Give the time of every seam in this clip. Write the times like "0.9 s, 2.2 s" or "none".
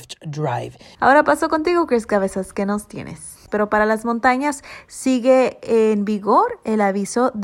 0.9 s, 3.5 s